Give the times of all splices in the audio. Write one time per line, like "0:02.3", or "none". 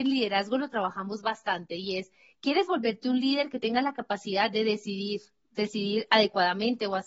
none